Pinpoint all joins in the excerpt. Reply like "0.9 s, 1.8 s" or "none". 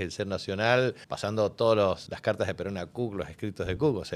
1.0 s, 2.1 s